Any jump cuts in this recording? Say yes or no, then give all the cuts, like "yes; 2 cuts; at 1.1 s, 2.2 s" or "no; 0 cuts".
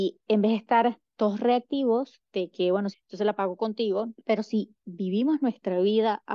yes; 2 cuts; at 2.9 s, 4.1 s